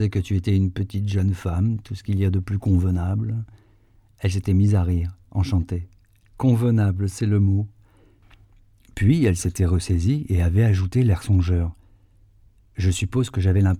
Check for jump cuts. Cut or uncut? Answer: uncut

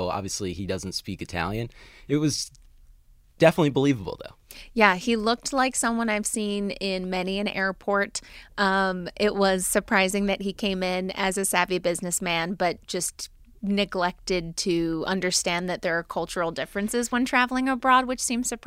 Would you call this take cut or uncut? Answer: uncut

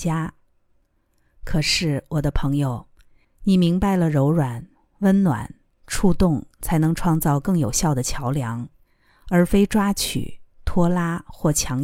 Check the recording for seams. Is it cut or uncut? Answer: cut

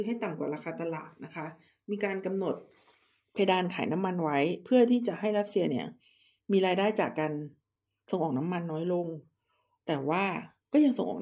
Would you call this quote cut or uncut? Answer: uncut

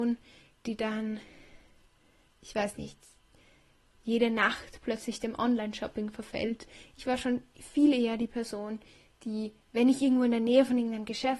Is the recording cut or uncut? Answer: uncut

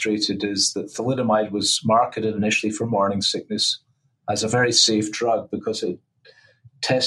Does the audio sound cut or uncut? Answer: uncut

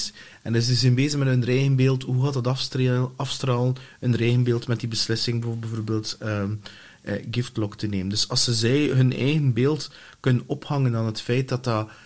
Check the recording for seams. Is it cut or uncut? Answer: uncut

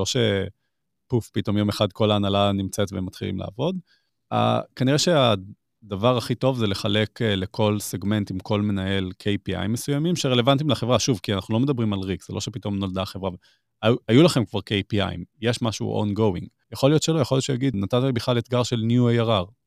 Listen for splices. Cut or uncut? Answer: cut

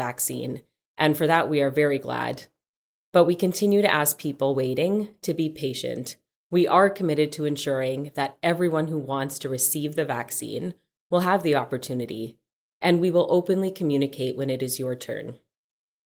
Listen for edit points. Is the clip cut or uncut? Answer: uncut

